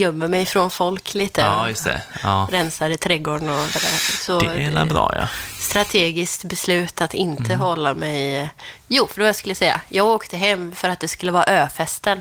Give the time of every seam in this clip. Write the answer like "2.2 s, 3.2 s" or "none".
3.7 s